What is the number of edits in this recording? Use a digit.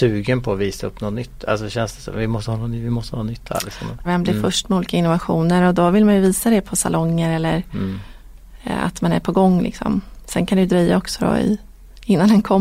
1